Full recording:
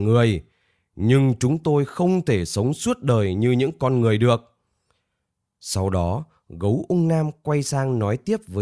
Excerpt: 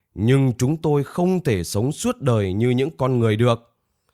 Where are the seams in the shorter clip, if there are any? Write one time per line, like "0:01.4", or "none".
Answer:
none